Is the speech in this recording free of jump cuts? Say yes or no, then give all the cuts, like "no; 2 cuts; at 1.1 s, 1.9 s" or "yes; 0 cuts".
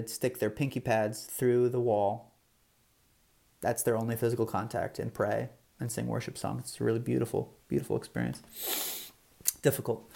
yes; 0 cuts